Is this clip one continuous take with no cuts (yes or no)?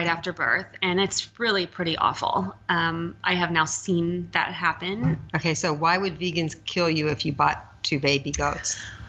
no